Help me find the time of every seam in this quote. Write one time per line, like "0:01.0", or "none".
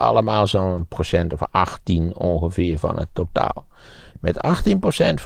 0:04.1